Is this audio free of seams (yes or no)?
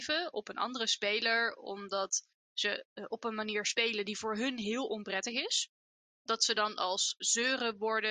no